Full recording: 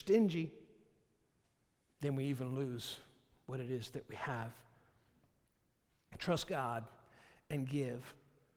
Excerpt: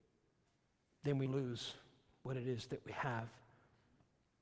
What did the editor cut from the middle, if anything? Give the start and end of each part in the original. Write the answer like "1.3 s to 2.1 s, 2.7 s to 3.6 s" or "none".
2.2 s to 2.5 s